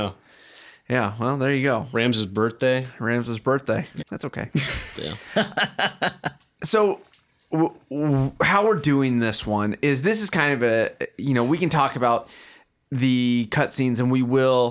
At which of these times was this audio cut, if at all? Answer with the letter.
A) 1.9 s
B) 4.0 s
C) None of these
B